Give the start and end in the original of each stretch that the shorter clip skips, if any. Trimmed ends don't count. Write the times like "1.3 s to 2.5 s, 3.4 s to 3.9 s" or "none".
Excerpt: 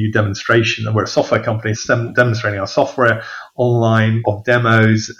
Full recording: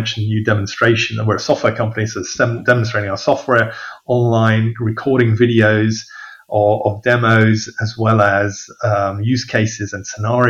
2.1 s to 2.3 s, 4.7 s to 6.8 s